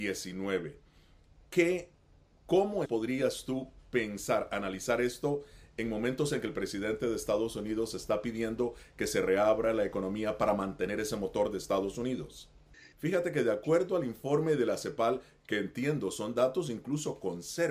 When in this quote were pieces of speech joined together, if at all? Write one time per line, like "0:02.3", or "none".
0:02.8
0:12.9

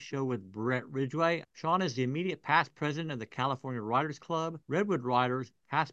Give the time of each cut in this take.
0:01.4
0:04.6

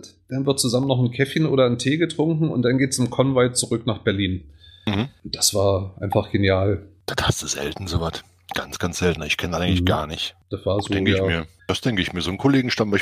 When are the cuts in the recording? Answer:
0:10.4

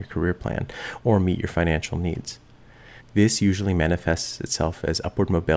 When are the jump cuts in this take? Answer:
0:03.0

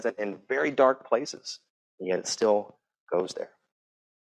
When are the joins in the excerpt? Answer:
0:01.8

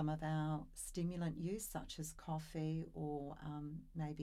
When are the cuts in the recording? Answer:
none

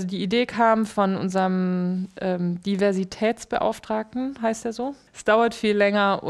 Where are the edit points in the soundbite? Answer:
0:05.1

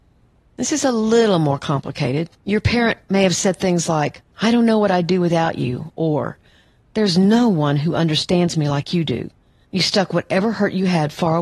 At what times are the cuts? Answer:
0:02.3
0:09.6

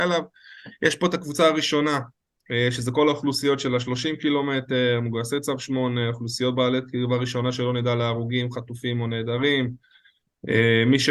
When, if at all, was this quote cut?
none

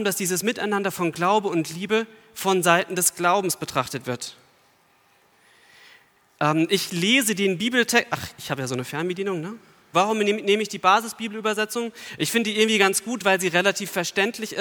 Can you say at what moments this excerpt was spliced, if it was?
0:09.9

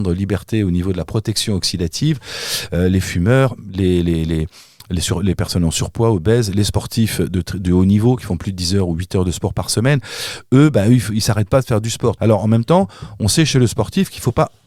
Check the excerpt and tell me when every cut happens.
0:12.2

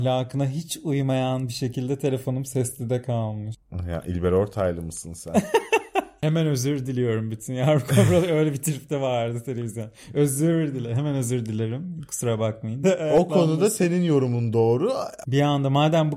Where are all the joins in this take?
0:12.8
0:15.2

